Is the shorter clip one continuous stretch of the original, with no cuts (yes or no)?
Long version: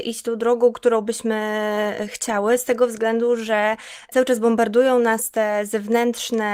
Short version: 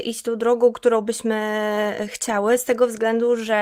yes